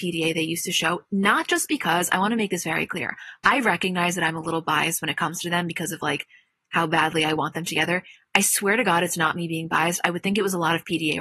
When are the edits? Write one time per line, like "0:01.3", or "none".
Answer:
none